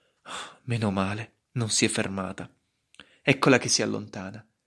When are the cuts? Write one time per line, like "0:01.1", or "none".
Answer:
none